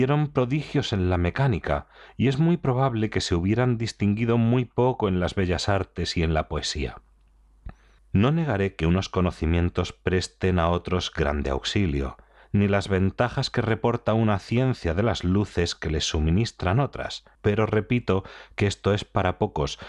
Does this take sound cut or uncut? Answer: cut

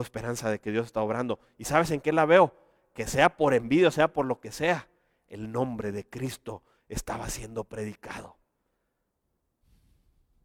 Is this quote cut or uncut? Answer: uncut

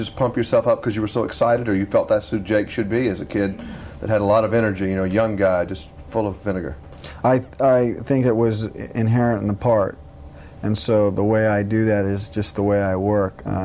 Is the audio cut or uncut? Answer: uncut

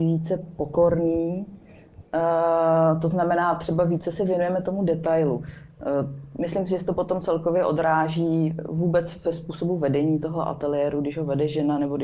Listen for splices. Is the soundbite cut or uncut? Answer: uncut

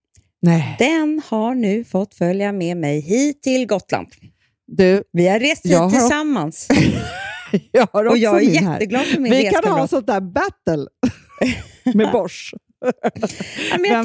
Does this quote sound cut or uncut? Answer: uncut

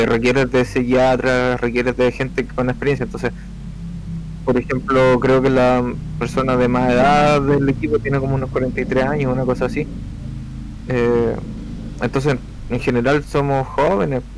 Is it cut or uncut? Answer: uncut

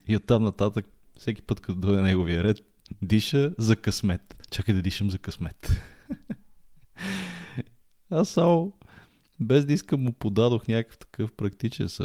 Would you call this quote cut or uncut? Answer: uncut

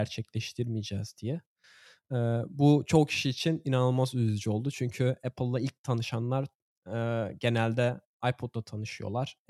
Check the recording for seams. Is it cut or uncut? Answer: uncut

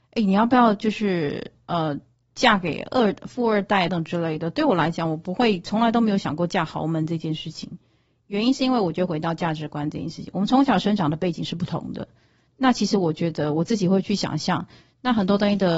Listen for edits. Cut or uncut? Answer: cut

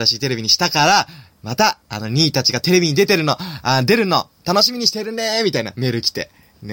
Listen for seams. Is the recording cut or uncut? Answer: uncut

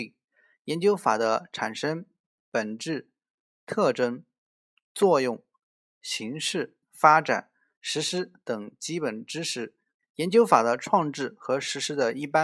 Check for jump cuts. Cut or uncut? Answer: cut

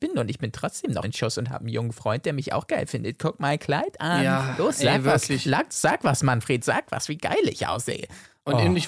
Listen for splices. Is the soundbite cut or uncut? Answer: cut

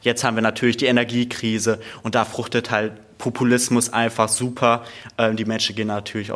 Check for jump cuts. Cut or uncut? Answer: uncut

